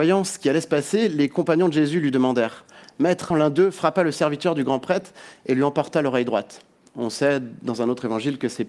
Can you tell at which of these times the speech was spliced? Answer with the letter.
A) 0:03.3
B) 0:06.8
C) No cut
A